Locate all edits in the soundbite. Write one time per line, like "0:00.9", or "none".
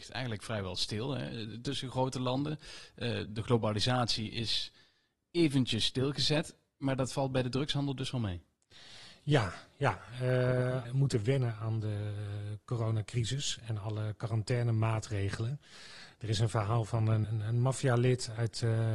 0:10.8
0:17.2